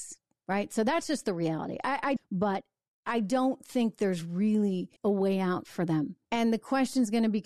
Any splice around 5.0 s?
yes; 3 cuts; at 2.2 s, 5.0 s, 6.2 s

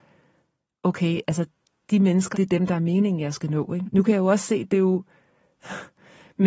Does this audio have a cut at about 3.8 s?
yes; 2 cuts; at 2.3 s, 3.8 s

